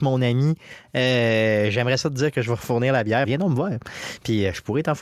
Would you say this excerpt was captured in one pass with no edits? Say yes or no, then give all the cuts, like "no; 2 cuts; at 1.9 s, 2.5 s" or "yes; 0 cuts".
no; 1 cut; at 3.3 s